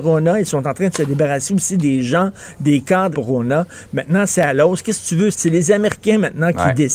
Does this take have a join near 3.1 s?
yes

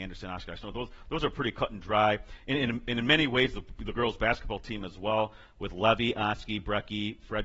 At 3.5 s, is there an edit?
no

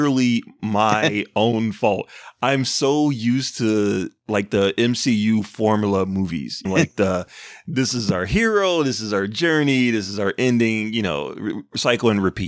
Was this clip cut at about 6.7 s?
yes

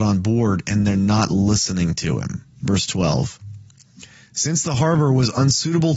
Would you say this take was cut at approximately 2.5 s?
yes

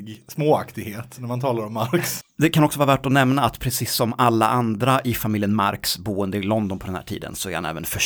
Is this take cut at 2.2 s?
yes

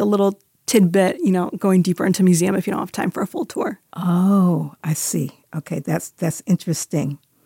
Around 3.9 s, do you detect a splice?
yes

